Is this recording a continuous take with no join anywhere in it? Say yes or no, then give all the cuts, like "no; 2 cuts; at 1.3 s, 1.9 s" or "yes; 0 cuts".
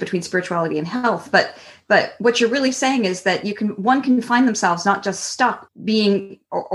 no; 1 cut; at 5.7 s